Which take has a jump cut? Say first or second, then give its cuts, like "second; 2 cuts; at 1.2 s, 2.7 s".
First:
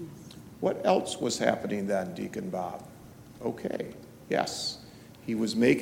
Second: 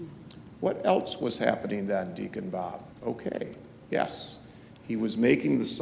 second; 1 cut; at 2.9 s